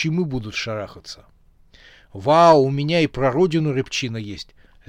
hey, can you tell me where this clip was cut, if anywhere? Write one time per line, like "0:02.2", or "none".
none